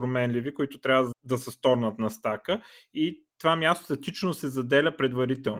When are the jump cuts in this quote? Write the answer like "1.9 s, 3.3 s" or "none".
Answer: 1.1 s, 3.3 s